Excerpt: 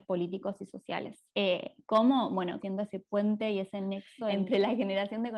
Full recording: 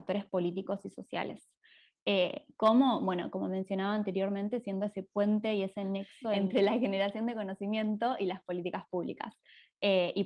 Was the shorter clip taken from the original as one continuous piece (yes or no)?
no